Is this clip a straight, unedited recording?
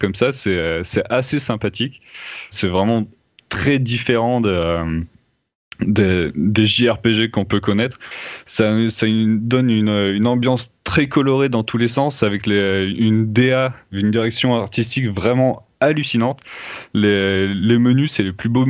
no; 1 cut; at 2.5 s

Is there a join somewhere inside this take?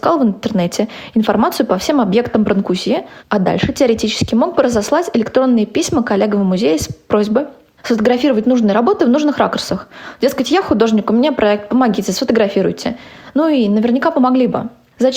no; 0 cuts

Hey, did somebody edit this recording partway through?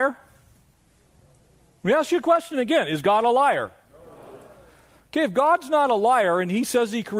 no; 0 cuts

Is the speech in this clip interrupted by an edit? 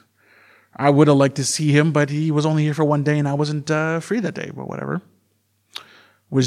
no; 0 cuts

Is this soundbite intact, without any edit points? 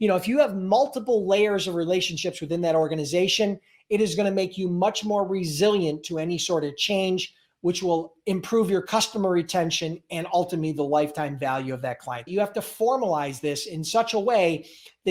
no; 1 cut; at 12.3 s

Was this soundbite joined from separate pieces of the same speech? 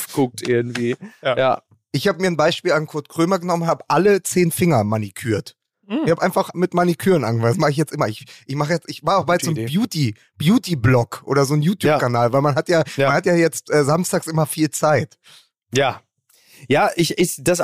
no; 0 cuts

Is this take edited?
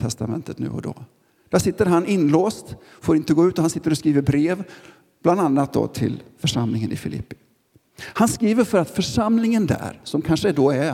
no; 0 cuts

